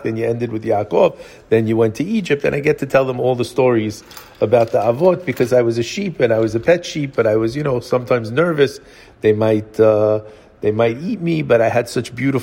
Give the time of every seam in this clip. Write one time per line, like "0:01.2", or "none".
none